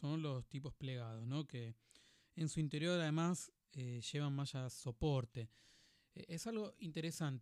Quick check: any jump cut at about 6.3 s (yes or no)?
no